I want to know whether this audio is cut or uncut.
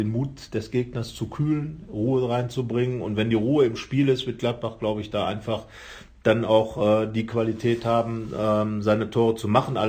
uncut